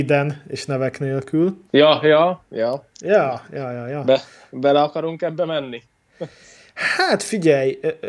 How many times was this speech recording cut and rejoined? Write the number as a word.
one